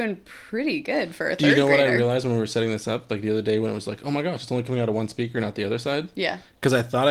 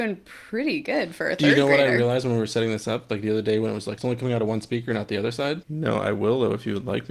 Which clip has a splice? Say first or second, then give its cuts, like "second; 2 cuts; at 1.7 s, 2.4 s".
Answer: second; 2 cuts; at 4.0 s, 5.6 s